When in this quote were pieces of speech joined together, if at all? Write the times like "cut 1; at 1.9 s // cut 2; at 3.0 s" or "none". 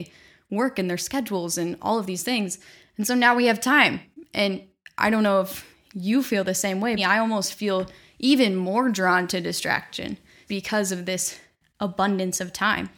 cut 1; at 7.0 s // cut 2; at 10.5 s